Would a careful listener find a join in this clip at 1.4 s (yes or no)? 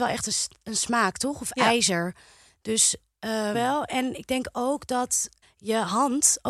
no